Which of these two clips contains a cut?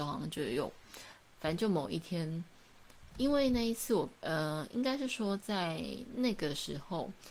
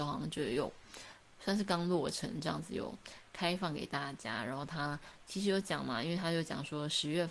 first; 1 cut; at 1.4 s

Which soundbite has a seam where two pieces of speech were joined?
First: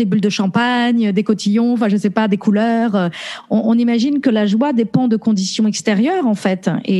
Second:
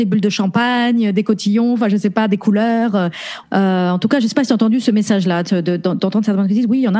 second; 1 cut; at 3.4 s

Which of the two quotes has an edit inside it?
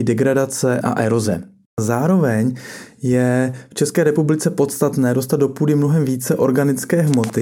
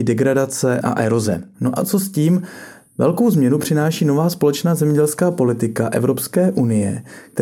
second; 1 cut; at 1.5 s

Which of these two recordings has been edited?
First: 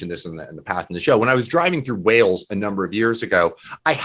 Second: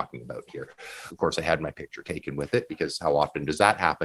second; 1 cut; at 1.1 s

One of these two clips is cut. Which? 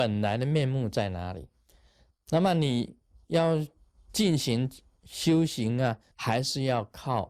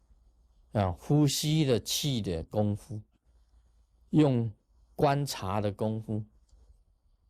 first; 2 cuts; at 2.1 s, 6.1 s

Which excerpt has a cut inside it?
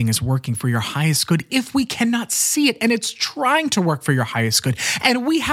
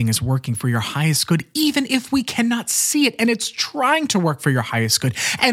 first; 1 cut; at 1.5 s

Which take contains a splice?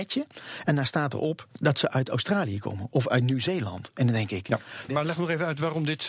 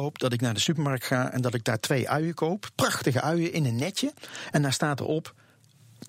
first; 2 cuts; at 1.5 s, 4.9 s

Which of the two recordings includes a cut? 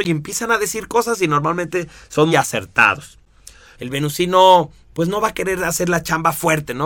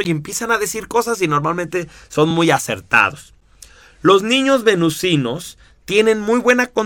first; 2 cuts; at 2.3 s, 3.7 s

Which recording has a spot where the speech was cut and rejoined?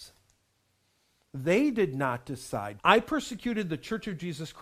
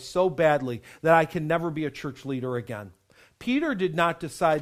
first; 1 cut; at 2.8 s

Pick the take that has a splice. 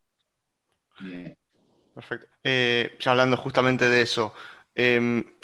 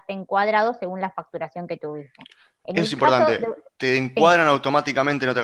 first; 1 cut; at 2.3 s

